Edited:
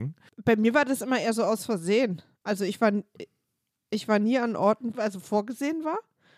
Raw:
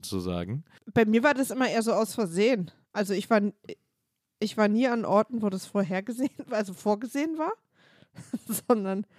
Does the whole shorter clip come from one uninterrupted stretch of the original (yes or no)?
no